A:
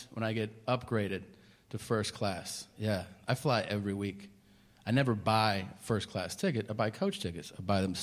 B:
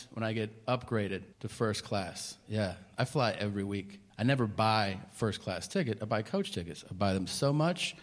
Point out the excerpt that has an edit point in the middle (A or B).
B